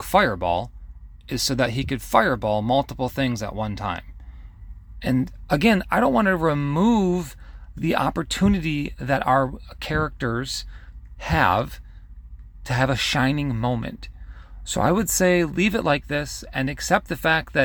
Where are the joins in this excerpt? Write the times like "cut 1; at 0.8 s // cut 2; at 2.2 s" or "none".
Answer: cut 1; at 4.9 s